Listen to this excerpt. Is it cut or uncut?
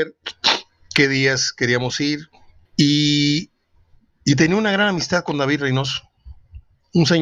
cut